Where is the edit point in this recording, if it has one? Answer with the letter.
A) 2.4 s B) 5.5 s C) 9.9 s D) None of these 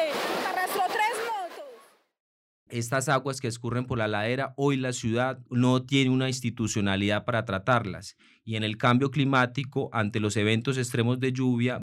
B